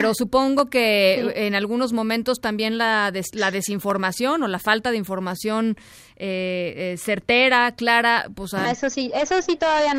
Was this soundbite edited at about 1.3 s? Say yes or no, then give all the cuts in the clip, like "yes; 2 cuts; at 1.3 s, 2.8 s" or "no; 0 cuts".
no; 1 cut; at 8.6 s